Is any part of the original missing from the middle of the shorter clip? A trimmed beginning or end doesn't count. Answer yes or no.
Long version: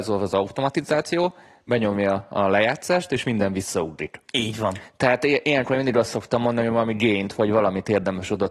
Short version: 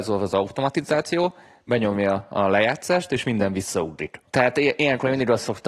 yes